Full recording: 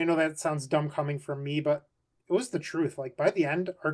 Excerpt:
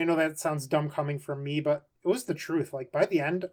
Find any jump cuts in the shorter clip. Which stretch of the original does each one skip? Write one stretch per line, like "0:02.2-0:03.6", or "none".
0:02.0-0:02.2